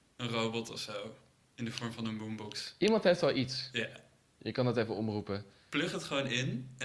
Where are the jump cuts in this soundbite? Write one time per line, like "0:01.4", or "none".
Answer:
none